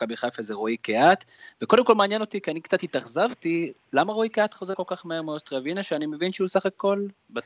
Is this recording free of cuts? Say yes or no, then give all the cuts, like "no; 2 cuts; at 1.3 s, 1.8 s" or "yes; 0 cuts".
yes; 0 cuts